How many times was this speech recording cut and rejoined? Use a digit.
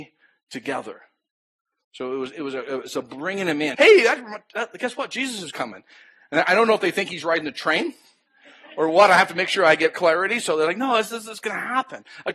1